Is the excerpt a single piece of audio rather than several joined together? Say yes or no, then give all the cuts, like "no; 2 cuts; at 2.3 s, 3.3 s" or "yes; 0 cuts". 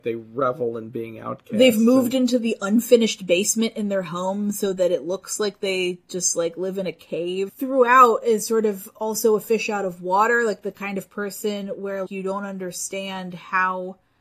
no; 2 cuts; at 7.5 s, 12.1 s